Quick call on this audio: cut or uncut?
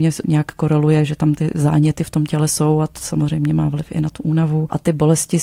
uncut